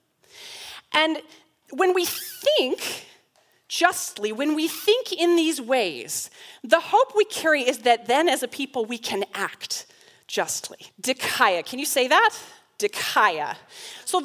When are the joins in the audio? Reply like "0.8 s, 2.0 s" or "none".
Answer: 10.9 s